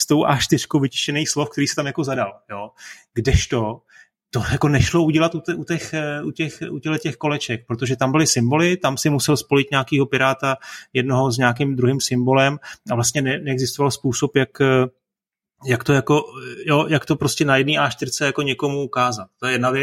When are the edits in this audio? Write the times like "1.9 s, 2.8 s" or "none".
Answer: none